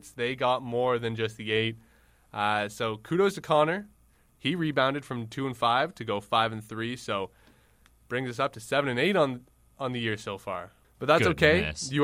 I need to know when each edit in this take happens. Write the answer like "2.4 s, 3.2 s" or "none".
none